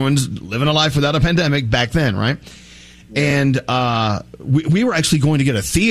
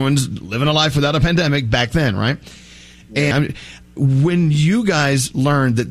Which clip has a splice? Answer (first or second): second